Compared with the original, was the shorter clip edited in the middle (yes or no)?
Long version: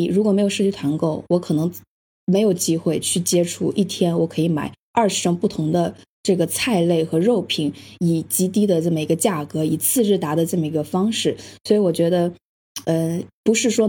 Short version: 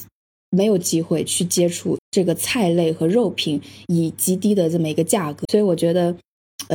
yes